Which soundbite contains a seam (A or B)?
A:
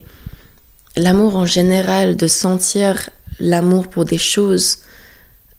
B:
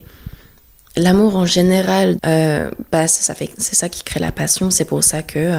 B